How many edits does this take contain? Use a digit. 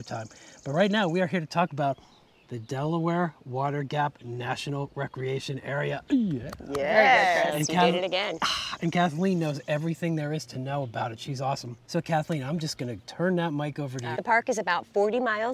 2